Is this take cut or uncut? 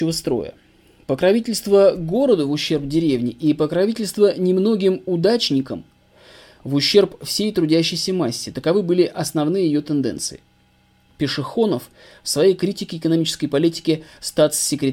cut